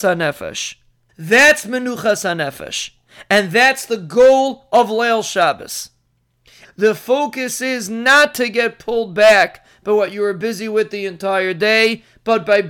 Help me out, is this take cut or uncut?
cut